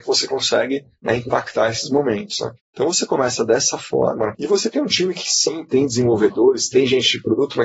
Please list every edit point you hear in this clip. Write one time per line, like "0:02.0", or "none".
0:04.3